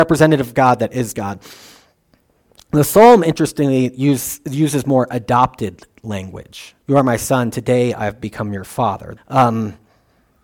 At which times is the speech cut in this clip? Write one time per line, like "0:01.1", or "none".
0:06.8
0:09.2

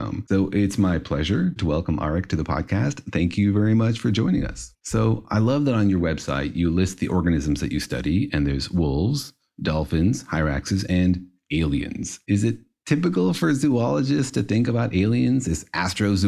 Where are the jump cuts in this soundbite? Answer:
0:04.7

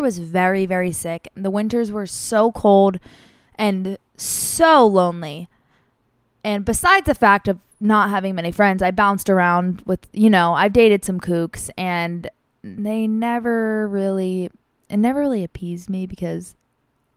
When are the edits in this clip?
none

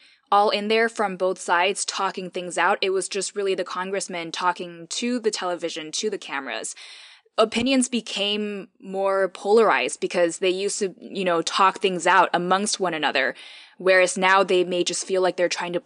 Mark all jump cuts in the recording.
none

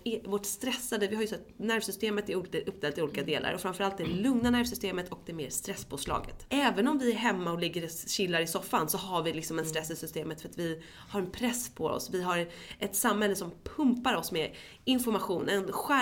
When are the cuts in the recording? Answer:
0:06.5

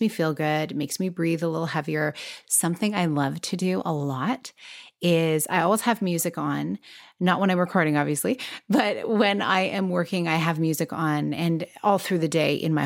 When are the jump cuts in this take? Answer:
0:02.4

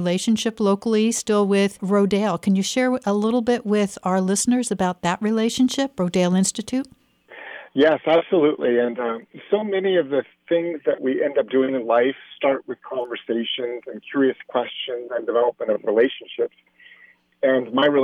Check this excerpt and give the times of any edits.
none

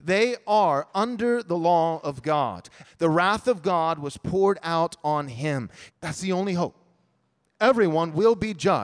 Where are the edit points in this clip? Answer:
0:02.8
0:05.9

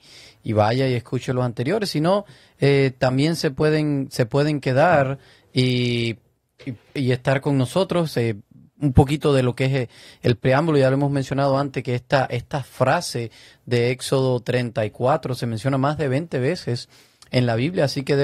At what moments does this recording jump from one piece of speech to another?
none

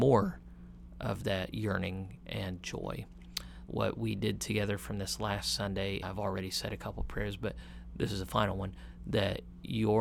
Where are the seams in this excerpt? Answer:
0:03.7
0:06.0

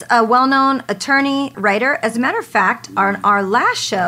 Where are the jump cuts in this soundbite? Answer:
0:01.5

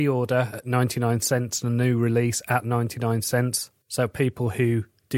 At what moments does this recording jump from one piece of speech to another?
none

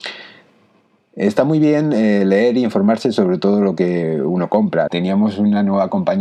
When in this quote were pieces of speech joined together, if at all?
0:04.9

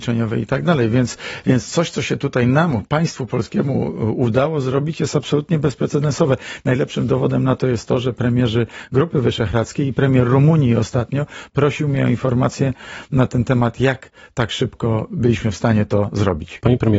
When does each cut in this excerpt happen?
none

